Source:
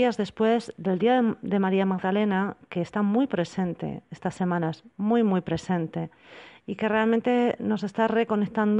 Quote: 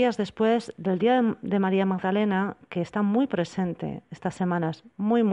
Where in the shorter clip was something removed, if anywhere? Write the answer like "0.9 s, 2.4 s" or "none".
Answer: none